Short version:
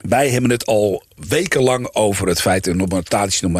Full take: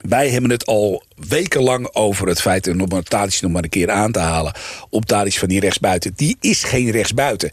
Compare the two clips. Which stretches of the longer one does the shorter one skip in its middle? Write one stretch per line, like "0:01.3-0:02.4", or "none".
none